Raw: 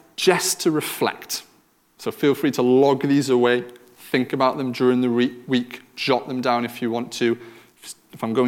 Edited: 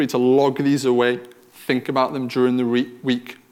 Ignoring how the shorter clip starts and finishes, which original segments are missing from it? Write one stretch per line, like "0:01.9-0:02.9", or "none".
none